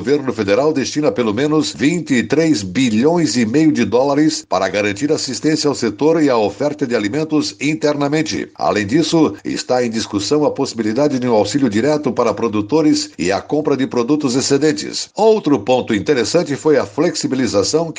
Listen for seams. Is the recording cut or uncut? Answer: uncut